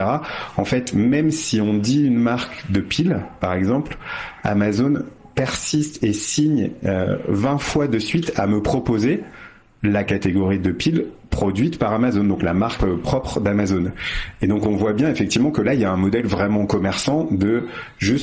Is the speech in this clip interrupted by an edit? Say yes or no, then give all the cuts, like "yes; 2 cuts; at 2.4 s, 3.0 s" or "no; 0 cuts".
no; 0 cuts